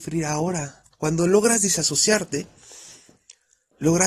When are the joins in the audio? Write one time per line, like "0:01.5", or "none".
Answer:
0:00.9